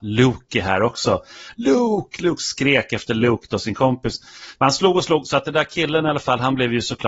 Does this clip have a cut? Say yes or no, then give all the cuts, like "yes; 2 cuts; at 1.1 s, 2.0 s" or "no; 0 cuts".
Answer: yes; 1 cut; at 4.5 s